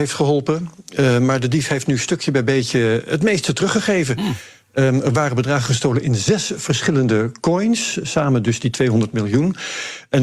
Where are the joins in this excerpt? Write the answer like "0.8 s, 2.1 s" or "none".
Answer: none